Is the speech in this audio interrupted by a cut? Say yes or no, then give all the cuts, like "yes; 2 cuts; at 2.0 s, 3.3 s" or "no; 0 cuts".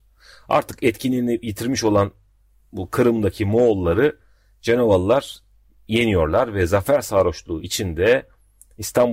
no; 0 cuts